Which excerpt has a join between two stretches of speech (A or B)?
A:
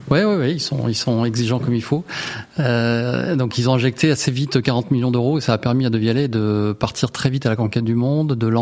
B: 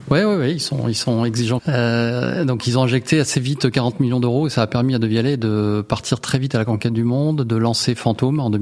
B